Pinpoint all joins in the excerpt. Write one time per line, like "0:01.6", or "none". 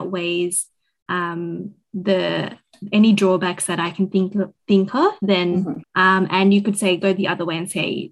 0:05.8